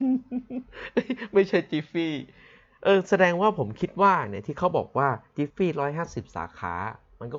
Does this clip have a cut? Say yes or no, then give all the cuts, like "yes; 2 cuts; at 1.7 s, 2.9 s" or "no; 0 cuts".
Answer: yes; 1 cut; at 5.5 s